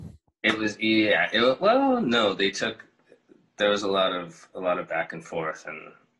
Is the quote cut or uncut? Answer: uncut